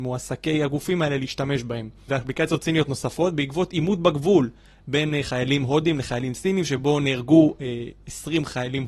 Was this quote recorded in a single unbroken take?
no; 1 cut; at 2.1 s

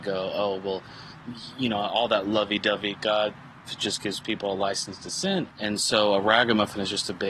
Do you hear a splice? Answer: yes; 2 cuts; at 3.7 s, 5.5 s

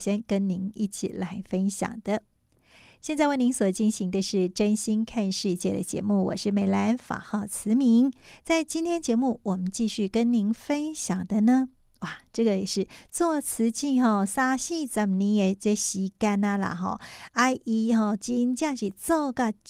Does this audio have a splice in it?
no; 0 cuts

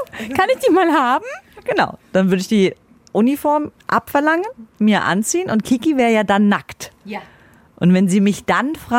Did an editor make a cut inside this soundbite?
no; 0 cuts

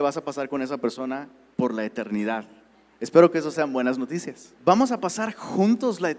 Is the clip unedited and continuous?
no; 1 cut; at 4.6 s

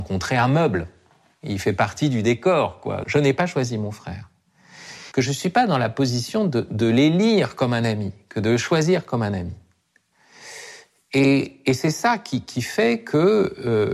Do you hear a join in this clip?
yes; 2 cuts; at 3.0 s, 5.1 s

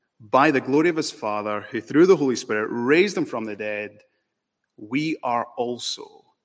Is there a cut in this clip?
no; 0 cuts

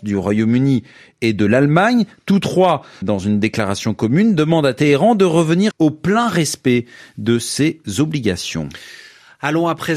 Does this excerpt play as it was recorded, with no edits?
no; 2 cuts; at 3.0 s, 5.7 s

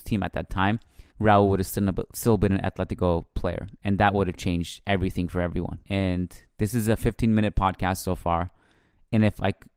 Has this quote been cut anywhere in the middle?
yes; 2 cuts; at 1.1 s, 5.8 s

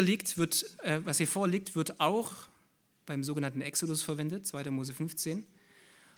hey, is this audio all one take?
yes; 0 cuts

